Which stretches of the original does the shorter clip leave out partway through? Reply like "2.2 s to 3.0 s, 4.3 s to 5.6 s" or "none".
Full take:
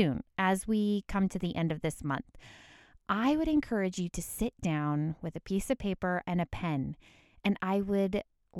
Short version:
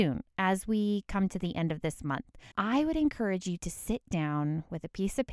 2.5 s to 3.0 s